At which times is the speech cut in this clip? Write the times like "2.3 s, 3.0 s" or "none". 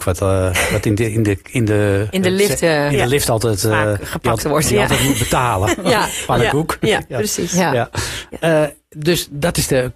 none